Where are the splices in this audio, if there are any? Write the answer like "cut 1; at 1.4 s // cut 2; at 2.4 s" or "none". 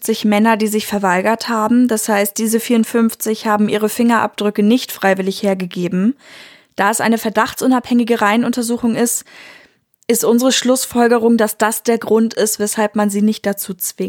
none